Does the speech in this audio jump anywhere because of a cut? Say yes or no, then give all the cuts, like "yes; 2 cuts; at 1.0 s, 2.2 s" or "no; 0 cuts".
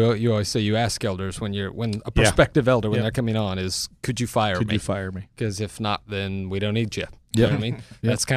no; 0 cuts